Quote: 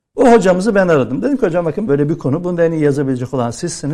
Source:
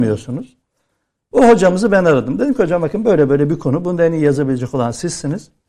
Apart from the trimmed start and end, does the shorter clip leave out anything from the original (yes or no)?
yes